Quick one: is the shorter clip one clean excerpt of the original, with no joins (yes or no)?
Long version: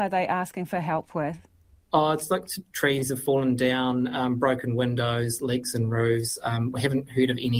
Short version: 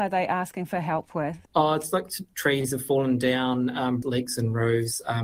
no